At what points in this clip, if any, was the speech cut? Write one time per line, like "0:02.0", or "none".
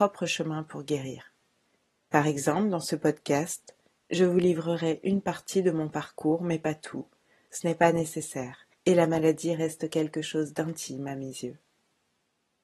0:02.1
0:08.7